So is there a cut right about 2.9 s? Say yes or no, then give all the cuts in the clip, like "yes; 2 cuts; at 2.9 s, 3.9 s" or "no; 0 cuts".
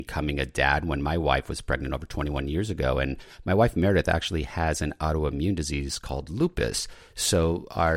no; 0 cuts